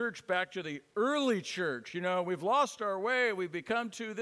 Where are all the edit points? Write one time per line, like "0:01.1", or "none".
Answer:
none

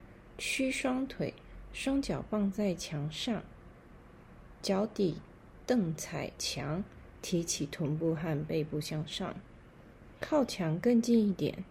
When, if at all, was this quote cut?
none

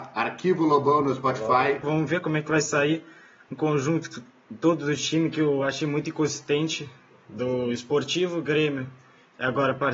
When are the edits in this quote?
0:01.8

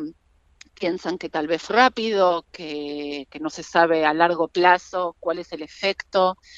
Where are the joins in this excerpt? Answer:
0:01.7

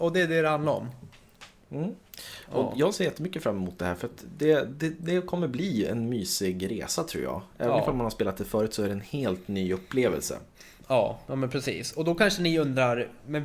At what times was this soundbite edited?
none

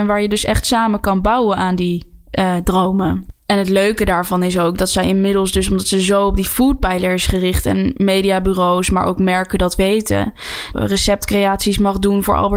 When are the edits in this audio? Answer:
0:10.7

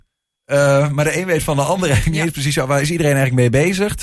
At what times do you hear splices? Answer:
none

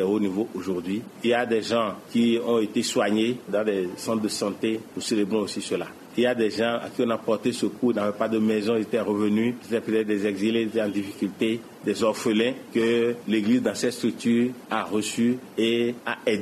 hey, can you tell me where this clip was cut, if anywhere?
none

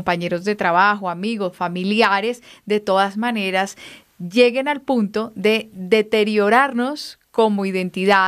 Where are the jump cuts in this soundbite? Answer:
none

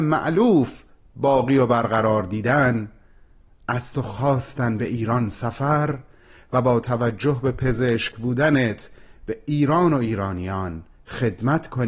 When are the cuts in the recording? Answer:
none

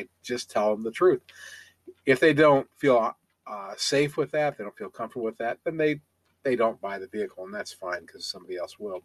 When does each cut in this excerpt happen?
0:02.7

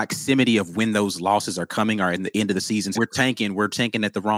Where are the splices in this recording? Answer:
0:02.9

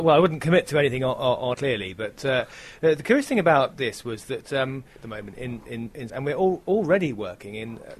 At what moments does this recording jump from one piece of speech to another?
0:01.5
0:05.0
0:06.1

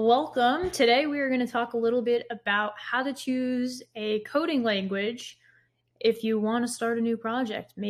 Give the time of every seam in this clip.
none

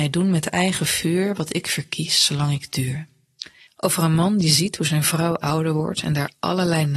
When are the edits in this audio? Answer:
0:03.7

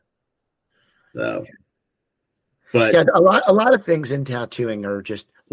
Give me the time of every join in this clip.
none

